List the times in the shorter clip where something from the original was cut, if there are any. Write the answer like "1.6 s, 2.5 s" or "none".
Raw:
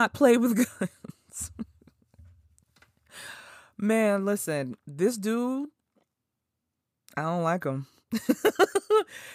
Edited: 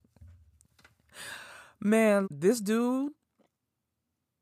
2.2 s